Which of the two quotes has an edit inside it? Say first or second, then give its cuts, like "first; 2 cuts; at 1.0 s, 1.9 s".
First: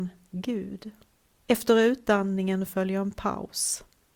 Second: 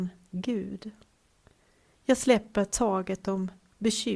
first; 1 cut; at 1.3 s